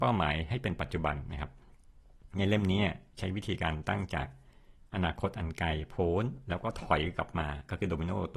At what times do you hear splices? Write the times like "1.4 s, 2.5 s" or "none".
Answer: none